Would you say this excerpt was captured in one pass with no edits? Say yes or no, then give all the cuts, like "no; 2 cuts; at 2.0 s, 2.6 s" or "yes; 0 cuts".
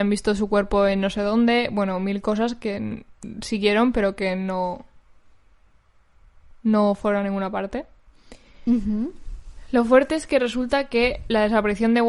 yes; 0 cuts